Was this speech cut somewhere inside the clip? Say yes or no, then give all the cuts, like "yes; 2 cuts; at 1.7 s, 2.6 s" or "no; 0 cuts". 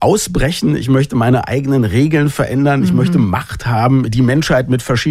yes; 1 cut; at 4.1 s